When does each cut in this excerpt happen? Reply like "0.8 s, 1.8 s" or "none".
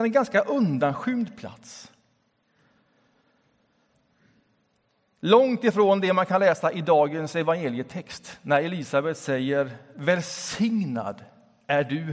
none